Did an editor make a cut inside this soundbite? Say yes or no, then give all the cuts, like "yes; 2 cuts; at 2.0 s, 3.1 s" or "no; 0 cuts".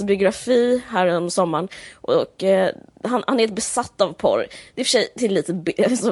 no; 0 cuts